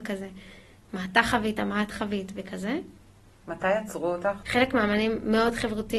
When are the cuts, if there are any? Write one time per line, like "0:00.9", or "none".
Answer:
0:03.4
0:04.4

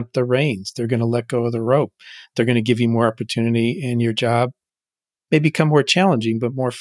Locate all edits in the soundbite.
none

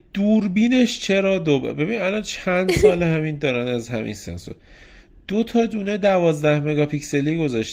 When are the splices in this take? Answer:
none

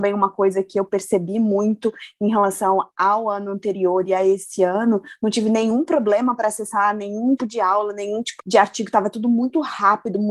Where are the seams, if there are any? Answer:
0:07.4
0:08.4

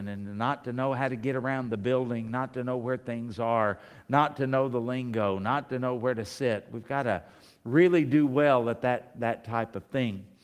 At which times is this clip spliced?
none

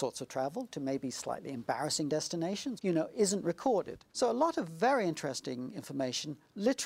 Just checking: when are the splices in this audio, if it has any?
0:02.8
0:04.1

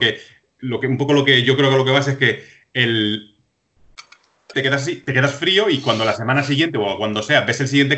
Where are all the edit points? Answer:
0:04.5

